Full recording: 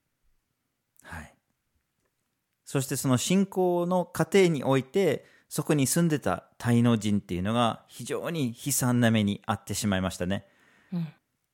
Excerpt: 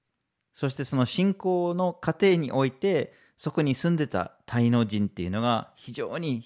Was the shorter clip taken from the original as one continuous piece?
yes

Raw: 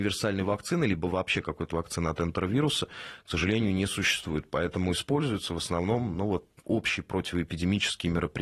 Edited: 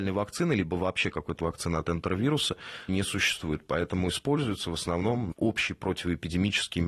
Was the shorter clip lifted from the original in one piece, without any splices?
no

